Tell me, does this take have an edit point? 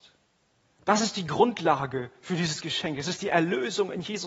no; 0 cuts

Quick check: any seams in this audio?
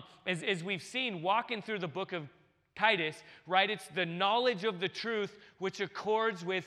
no; 0 cuts

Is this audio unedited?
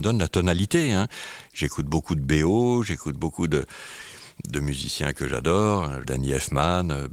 no; 1 cut; at 6.0 s

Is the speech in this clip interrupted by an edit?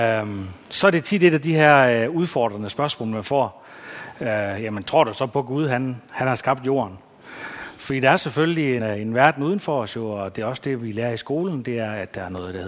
yes; 1 cut; at 8.8 s

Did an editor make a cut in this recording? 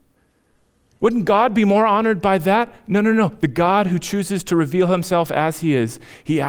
no; 0 cuts

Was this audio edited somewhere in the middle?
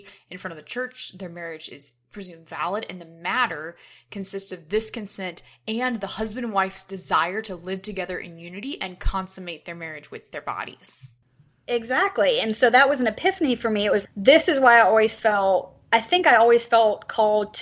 yes; 1 cut; at 14.0 s

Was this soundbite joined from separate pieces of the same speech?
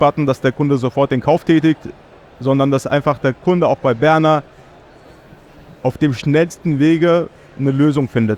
no; 0 cuts

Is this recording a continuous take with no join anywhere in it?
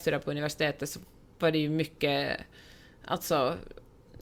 yes; 0 cuts

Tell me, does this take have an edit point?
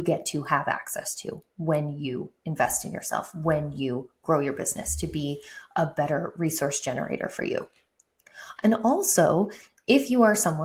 yes; 1 cut; at 8.6 s

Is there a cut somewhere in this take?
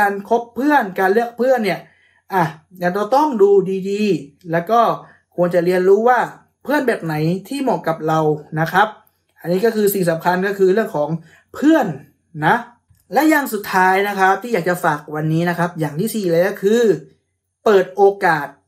no; 0 cuts

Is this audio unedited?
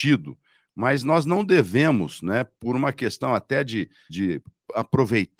no; 1 cut; at 4.1 s

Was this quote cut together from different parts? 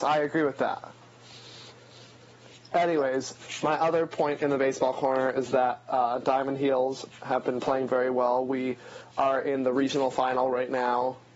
no; 0 cuts

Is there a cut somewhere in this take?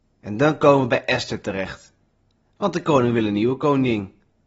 no; 0 cuts

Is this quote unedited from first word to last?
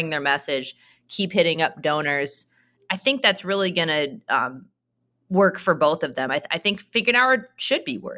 yes; 0 cuts

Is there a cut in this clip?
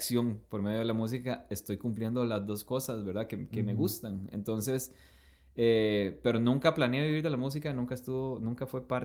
no; 0 cuts

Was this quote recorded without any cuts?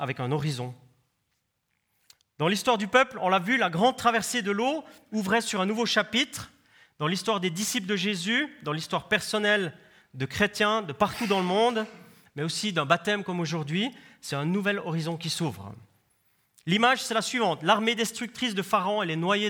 yes; 0 cuts

